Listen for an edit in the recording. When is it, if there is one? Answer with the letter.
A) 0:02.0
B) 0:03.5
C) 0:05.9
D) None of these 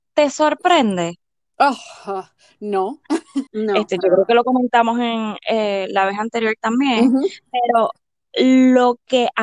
B